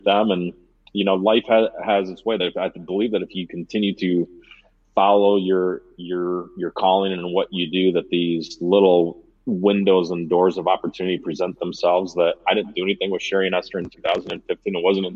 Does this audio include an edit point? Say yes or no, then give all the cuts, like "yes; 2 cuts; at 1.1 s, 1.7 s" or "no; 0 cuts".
no; 0 cuts